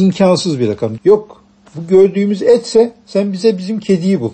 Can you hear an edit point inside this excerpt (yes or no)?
yes